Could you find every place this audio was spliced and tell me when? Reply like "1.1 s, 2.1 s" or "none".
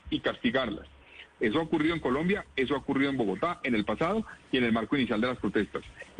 1.3 s

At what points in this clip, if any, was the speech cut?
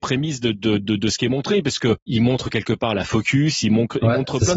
2.1 s

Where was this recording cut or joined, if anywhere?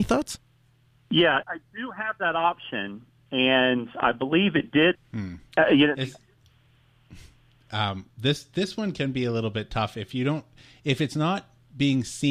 1.4 s, 4.9 s

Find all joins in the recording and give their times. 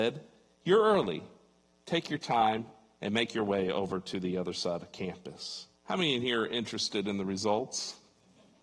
5.8 s

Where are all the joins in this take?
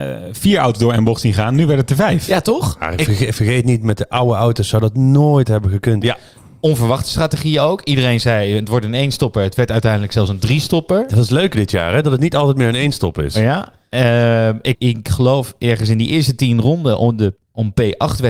6.0 s, 14.7 s, 17.4 s

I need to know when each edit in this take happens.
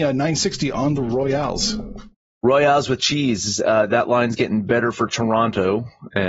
none

